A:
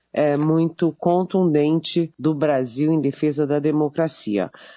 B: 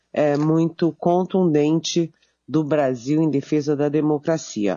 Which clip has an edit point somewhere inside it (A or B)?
A